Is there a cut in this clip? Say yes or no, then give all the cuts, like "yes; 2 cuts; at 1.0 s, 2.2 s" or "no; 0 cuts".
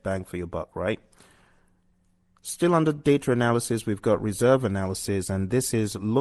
no; 0 cuts